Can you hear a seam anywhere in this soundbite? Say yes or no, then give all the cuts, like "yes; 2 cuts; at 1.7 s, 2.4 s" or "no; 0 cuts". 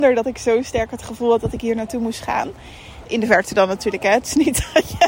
yes; 1 cut; at 3.0 s